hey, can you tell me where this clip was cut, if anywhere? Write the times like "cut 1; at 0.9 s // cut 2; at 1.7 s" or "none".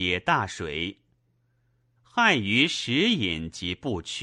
cut 1; at 2.0 s